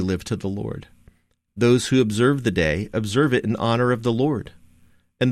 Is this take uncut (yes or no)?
no